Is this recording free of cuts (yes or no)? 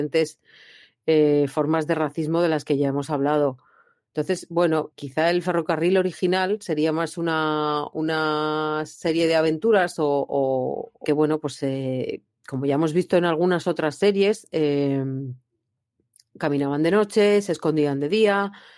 no